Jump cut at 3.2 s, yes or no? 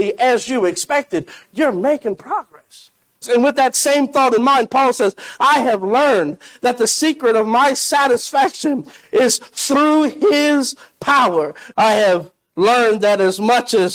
yes